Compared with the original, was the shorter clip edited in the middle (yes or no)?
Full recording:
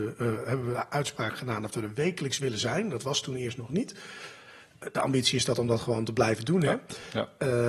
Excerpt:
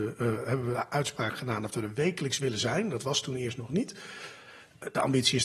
no